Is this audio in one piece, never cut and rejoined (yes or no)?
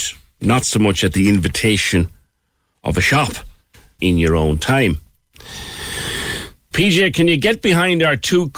no